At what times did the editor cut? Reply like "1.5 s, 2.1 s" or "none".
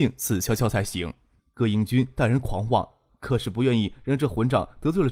1.4 s, 3.1 s